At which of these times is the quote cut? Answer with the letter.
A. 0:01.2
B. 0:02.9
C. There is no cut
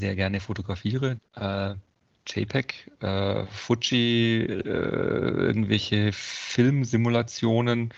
A